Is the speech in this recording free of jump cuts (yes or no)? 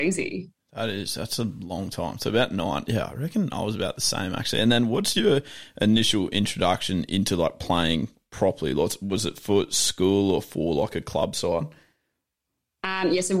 yes